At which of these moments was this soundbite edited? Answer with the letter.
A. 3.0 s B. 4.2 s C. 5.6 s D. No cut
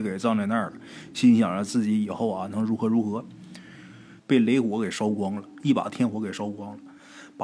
B